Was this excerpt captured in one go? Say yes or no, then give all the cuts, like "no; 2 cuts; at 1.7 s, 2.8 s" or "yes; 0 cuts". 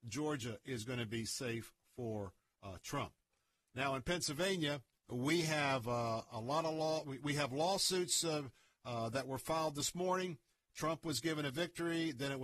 yes; 0 cuts